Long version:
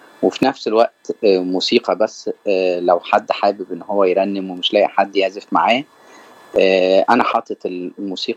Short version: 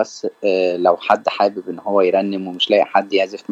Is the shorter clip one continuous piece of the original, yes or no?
yes